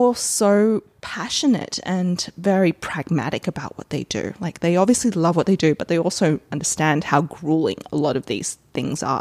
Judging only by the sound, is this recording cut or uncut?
uncut